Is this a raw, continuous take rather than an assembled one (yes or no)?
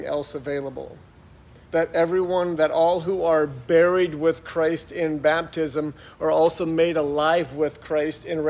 no